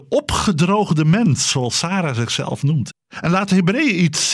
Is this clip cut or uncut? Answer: cut